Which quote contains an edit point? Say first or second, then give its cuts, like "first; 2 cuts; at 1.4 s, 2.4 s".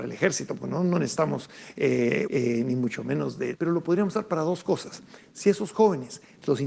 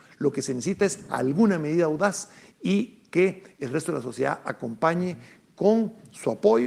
first; 2 cuts; at 2.3 s, 3.5 s